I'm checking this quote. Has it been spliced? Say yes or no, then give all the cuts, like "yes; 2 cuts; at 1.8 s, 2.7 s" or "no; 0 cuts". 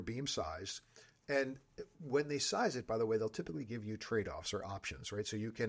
no; 0 cuts